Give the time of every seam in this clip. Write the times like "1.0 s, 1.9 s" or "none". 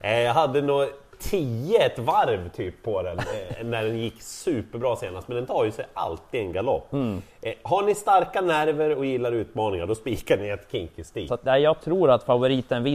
11.3 s